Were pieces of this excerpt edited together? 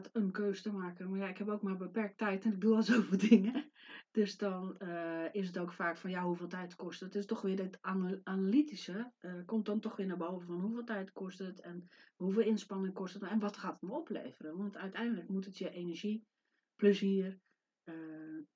no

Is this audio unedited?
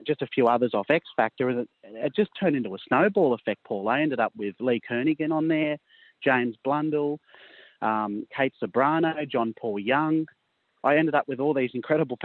yes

